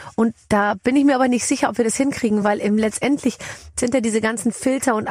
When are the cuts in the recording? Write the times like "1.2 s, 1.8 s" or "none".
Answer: none